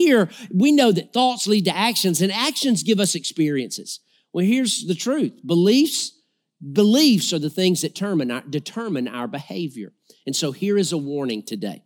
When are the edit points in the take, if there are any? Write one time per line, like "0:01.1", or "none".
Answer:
none

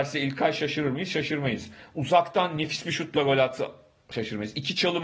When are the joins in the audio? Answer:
none

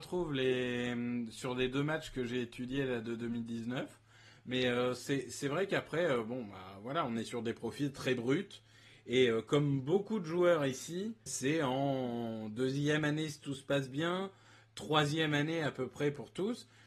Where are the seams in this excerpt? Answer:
0:11.3

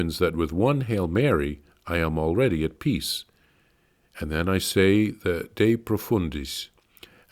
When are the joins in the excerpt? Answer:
none

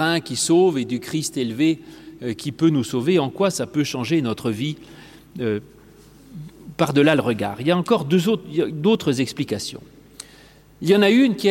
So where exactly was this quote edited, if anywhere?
none

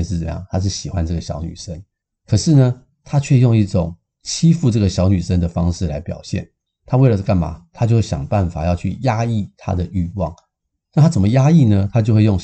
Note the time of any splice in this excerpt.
0:07.7

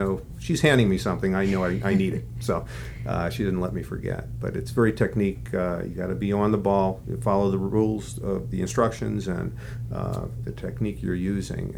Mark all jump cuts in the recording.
none

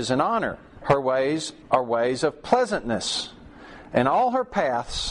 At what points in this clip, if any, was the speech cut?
none

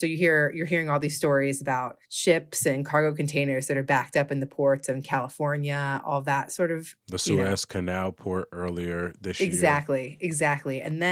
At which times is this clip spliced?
0:02.0

